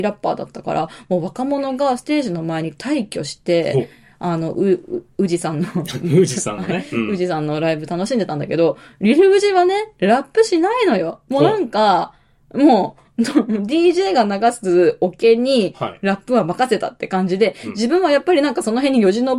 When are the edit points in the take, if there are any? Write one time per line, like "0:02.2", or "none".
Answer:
none